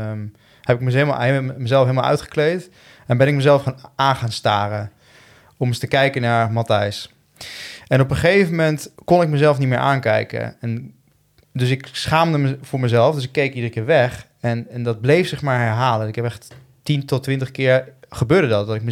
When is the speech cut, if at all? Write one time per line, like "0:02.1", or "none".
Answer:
0:08.9